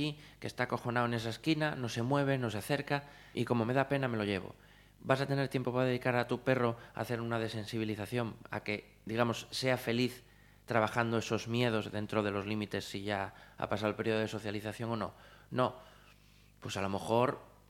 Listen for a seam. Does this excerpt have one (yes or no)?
yes